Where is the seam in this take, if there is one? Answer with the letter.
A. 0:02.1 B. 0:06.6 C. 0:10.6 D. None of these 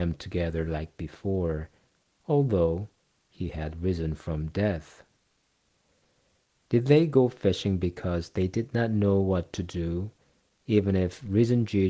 B